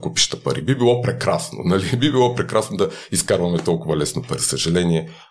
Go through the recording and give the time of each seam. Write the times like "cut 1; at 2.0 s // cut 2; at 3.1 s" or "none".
cut 1; at 4.4 s